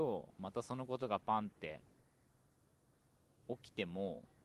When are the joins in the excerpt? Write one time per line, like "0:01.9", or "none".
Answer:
none